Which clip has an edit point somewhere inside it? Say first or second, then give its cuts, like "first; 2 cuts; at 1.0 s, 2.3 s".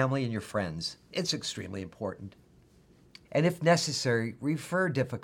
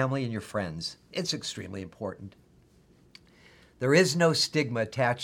first; 1 cut; at 3.2 s